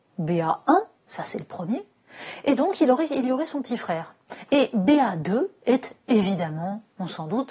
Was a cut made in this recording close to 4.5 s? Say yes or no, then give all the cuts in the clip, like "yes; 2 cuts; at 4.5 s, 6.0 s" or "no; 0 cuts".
no; 0 cuts